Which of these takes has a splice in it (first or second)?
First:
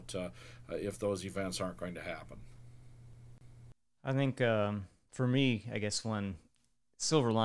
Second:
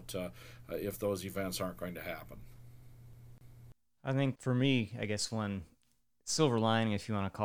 second